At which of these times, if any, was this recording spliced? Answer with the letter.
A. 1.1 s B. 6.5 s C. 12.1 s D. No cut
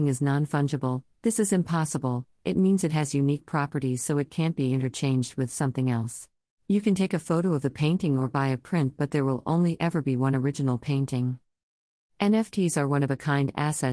B